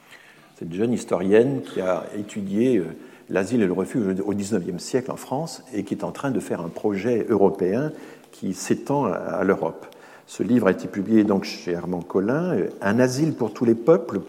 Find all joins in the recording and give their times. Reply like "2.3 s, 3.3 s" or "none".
none